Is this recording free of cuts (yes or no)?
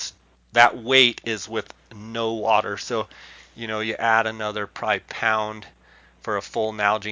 yes